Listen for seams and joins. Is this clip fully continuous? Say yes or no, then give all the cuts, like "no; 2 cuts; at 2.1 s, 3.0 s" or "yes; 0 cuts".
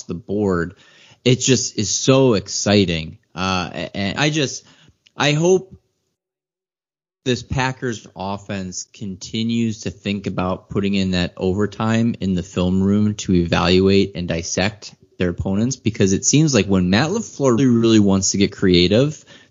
no; 2 cuts; at 4.2 s, 17.6 s